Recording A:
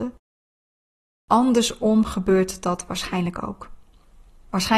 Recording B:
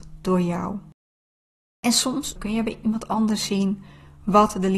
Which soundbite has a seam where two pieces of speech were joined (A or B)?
B